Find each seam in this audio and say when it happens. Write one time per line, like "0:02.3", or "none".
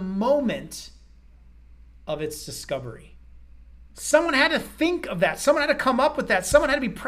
0:03.8